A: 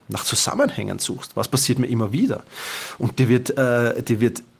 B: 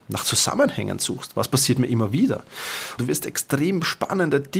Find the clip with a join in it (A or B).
B